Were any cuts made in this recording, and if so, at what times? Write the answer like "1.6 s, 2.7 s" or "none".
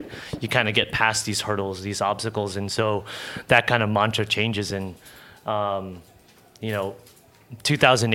none